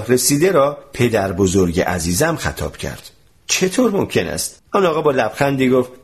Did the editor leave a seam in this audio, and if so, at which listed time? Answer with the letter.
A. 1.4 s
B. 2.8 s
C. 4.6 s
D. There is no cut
C